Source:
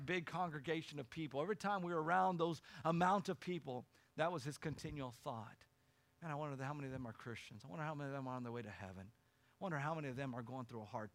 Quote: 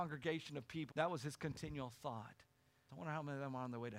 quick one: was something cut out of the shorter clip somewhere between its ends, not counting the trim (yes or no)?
yes